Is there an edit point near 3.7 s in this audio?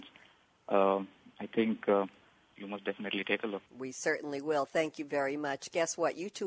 yes; 2 cuts; at 2.6 s, 3.7 s

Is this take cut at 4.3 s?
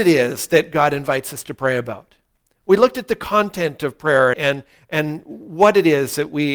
yes; 1 cut; at 4.3 s

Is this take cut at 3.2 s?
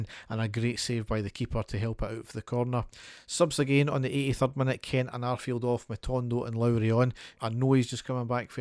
no; 1 cut; at 7.3 s

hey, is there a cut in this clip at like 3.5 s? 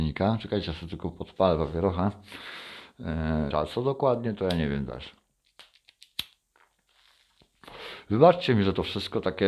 yes; 1 cut; at 3.5 s

